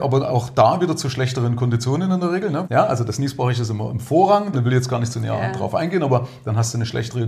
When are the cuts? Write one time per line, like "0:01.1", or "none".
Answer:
0:02.6
0:04.5